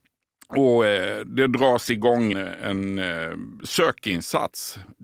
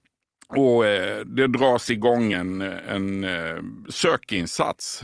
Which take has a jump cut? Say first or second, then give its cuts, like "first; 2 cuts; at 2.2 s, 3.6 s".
first; 1 cut; at 2.3 s